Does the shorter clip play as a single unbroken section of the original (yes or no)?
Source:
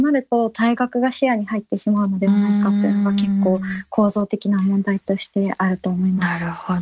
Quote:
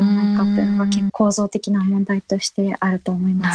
no